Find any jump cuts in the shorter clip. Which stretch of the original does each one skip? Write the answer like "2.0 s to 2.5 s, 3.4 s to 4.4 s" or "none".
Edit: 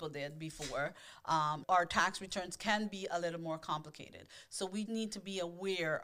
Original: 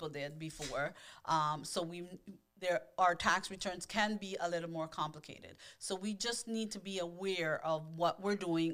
1.6 s to 2.9 s, 6.1 s to 6.4 s